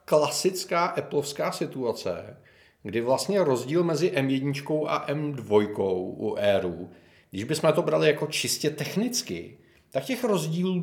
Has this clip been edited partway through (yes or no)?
no